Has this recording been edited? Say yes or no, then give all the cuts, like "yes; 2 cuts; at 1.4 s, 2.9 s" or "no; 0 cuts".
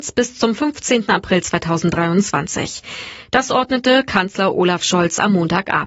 no; 0 cuts